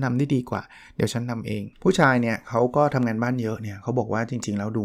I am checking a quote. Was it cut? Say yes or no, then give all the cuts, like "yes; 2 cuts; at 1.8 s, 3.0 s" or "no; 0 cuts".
yes; 1 cut; at 1.7 s